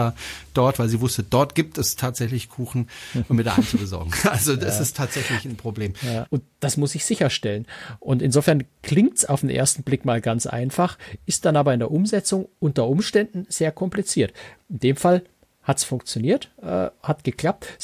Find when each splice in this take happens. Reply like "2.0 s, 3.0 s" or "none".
6.3 s

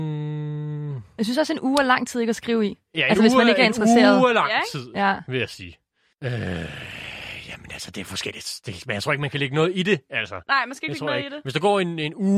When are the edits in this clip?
none

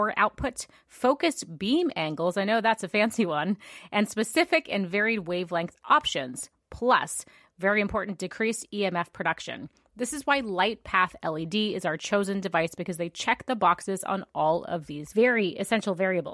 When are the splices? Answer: none

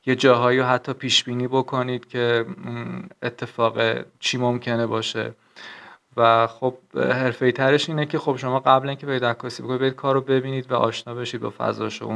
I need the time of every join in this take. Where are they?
4.1 s

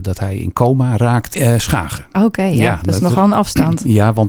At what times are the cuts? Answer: 1.3 s

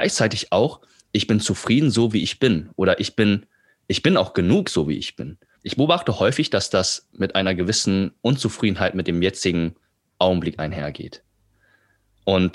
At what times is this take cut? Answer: 5.5 s

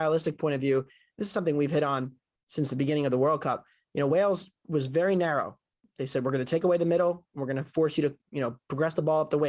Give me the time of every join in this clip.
none

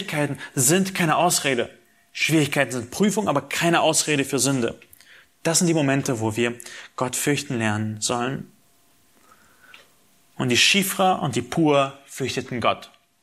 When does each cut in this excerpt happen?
none

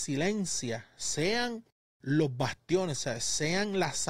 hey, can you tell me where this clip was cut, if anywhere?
2.9 s

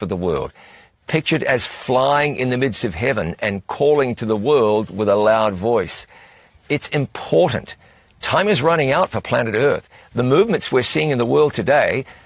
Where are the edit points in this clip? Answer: none

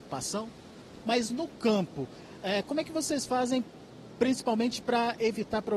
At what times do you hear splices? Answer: 1.0 s

